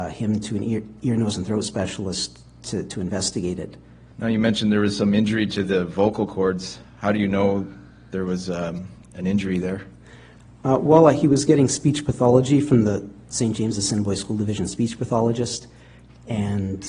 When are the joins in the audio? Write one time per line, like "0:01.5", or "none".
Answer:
0:04.1